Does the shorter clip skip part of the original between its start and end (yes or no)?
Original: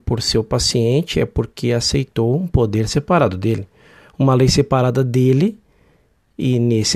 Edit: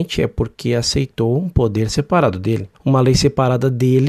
yes